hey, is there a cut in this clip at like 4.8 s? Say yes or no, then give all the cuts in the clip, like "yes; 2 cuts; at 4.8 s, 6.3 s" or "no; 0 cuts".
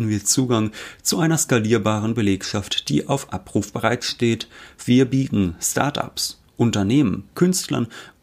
no; 1 cut; at 7.3 s